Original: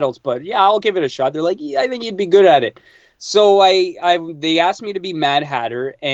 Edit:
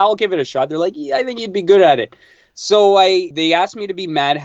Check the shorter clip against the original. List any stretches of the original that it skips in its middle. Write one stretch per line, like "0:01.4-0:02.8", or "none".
0:03.9-0:04.4